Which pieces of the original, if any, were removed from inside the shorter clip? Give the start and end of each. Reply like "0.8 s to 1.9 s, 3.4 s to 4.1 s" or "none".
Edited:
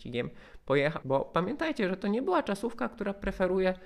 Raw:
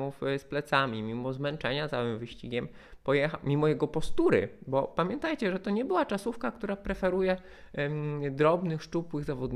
3.4 s to 4.6 s